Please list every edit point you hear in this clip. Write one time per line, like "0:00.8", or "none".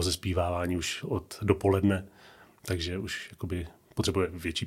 0:01.0